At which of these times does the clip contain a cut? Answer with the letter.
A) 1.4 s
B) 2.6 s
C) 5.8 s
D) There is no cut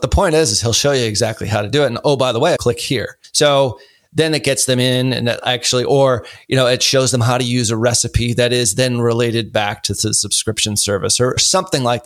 B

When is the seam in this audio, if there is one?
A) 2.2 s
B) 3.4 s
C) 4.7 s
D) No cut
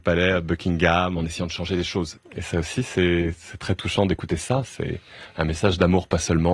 A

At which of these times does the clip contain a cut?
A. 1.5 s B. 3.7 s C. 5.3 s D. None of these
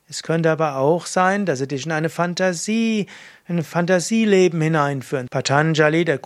C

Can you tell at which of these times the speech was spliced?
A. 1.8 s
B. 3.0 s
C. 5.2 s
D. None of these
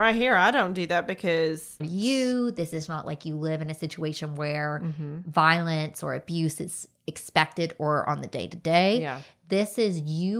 A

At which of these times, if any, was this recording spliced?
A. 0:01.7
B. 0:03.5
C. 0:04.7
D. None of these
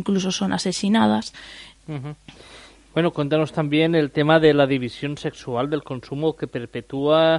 A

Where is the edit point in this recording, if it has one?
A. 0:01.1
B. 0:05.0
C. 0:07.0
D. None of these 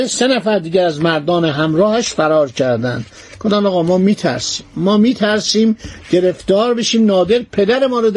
D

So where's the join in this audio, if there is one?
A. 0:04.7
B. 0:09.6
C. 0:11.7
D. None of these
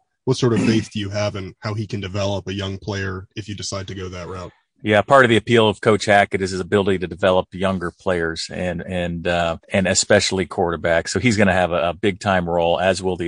B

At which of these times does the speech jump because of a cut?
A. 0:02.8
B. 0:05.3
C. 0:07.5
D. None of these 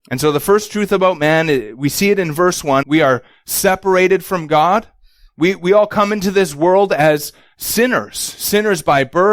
A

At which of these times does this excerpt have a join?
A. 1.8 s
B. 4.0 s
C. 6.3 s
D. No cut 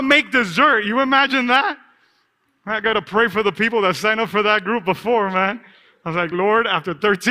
D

